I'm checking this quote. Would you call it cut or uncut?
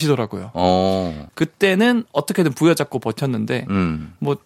cut